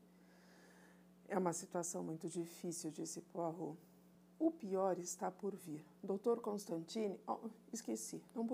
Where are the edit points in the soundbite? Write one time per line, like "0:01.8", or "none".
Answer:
none